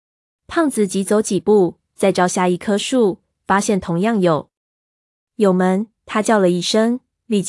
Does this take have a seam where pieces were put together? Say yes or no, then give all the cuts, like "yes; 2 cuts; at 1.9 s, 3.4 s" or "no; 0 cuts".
no; 0 cuts